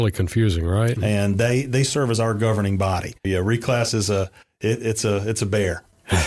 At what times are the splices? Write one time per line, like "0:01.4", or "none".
0:01.0
0:03.2